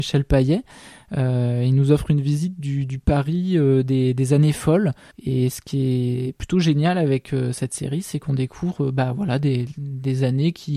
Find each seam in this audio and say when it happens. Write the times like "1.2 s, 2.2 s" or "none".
5.1 s